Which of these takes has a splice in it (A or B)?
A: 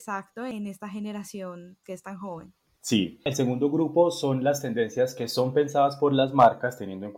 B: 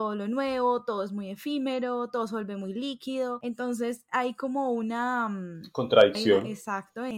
A